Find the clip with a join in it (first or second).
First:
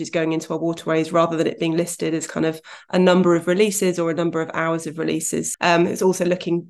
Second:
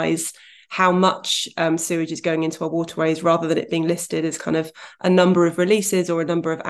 first